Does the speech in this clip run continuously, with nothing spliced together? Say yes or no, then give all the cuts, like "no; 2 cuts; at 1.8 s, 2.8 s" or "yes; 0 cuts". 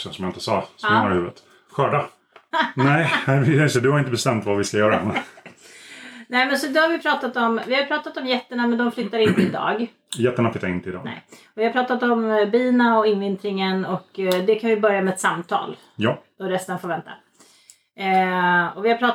no; 1 cut; at 2.5 s